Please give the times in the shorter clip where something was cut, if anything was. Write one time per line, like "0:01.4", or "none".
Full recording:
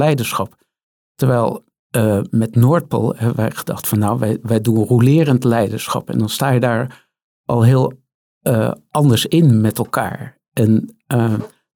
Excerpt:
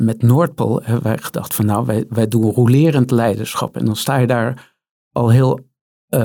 none